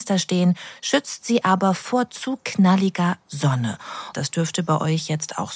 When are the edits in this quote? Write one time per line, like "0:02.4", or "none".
0:04.1